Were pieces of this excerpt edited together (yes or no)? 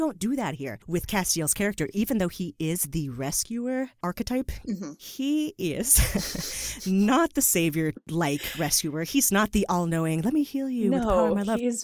no